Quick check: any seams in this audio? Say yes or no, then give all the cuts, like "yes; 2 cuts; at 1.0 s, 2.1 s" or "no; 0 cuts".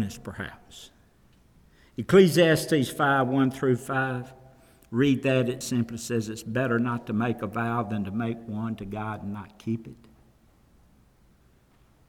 yes; 1 cut; at 5.6 s